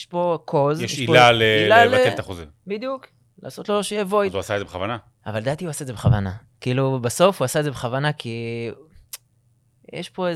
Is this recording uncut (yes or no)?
yes